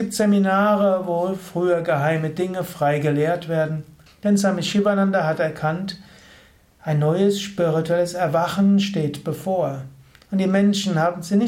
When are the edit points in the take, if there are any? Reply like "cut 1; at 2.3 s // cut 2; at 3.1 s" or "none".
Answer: cut 1; at 4.1 s